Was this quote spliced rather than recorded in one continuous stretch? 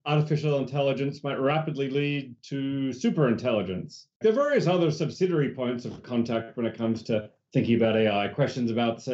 yes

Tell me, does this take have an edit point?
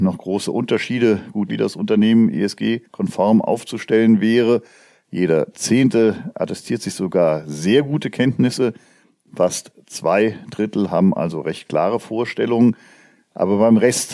yes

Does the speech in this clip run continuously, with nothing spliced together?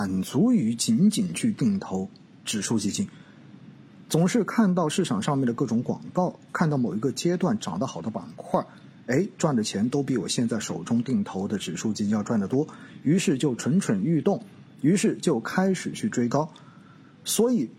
yes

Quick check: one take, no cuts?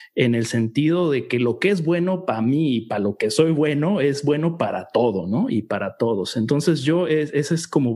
yes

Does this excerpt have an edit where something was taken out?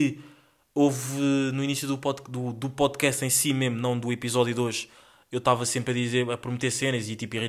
no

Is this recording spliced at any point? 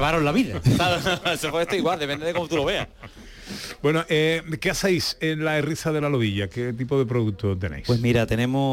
no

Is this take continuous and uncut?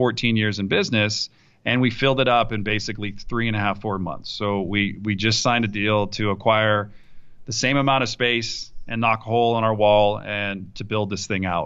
yes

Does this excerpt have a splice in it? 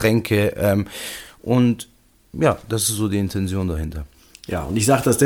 no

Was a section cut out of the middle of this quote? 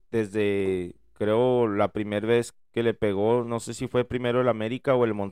no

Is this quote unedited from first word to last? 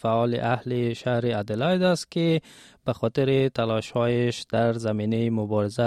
yes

